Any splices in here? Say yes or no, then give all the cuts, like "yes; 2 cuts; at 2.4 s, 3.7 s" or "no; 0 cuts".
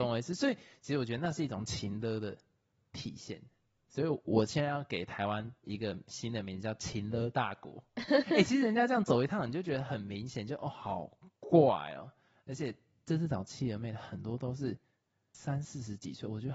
no; 0 cuts